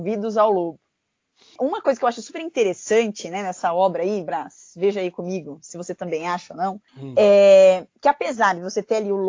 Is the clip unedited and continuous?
no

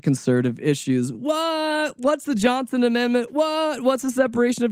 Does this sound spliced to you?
no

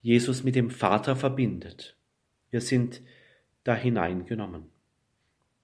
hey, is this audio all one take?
yes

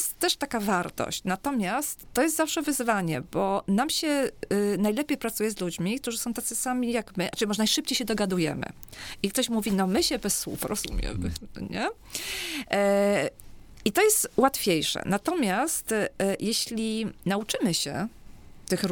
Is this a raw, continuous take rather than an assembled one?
yes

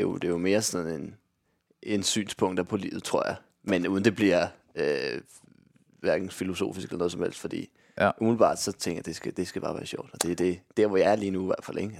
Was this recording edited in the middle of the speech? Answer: no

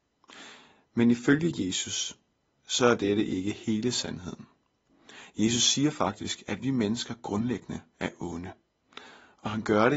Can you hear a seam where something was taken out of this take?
no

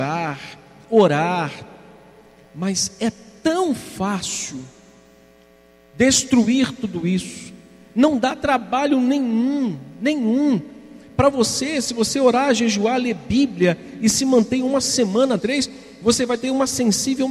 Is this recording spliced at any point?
yes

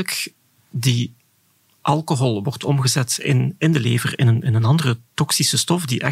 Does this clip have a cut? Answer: no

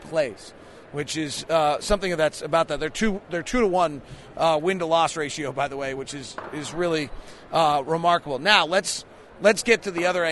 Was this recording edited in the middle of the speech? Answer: no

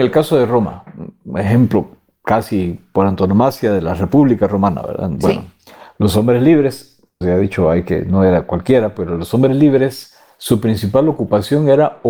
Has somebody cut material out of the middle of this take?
yes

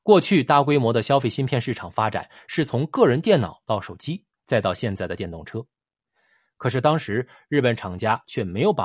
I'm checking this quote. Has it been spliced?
no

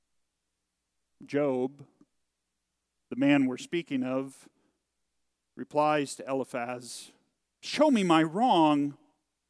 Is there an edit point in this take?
no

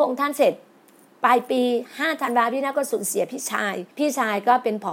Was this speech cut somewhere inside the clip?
yes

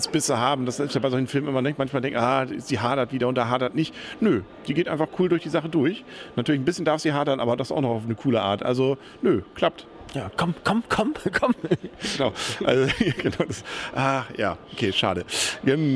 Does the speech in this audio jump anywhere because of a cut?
no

